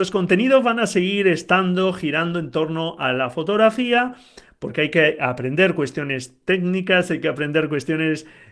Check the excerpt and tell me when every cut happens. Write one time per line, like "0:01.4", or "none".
none